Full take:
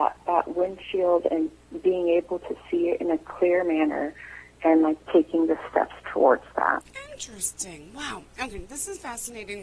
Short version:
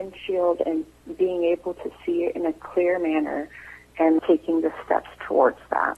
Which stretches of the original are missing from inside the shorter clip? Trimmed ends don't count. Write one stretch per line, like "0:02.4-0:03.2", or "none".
0:04.8-0:05.0